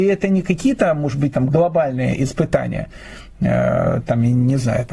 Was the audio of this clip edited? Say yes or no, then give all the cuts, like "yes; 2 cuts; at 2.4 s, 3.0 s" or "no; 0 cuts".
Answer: yes; 1 cut; at 1.3 s